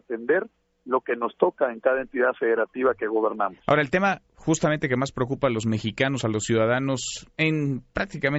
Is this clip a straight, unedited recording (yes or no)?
yes